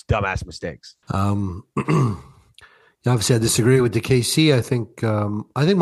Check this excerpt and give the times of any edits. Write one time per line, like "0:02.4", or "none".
0:01.0